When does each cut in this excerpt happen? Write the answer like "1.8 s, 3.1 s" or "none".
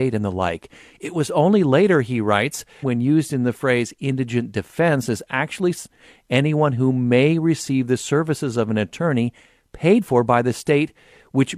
2.8 s